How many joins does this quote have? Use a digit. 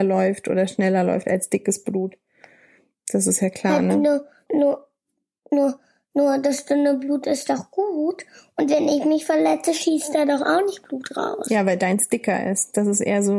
1